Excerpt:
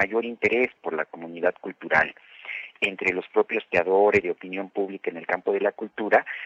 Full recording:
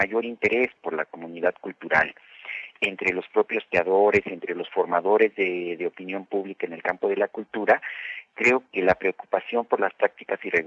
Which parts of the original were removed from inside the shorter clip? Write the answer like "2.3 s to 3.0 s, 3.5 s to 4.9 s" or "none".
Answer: 4.2 s to 5.8 s